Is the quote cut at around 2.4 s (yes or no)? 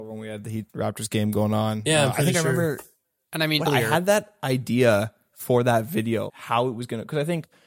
no